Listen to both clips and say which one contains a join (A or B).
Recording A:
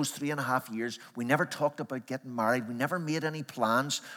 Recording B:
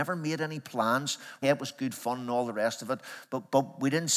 B